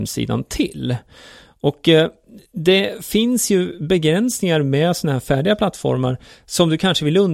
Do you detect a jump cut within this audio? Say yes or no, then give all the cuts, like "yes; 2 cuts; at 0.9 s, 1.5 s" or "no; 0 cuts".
no; 0 cuts